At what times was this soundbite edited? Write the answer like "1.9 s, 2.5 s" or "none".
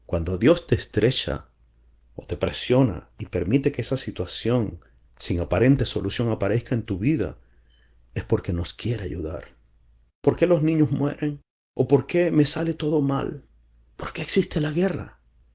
10.1 s